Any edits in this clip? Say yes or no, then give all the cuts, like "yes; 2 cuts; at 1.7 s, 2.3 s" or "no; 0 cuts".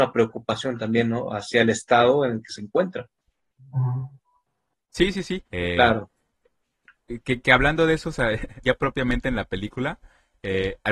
yes; 2 cuts; at 5.5 s, 8.6 s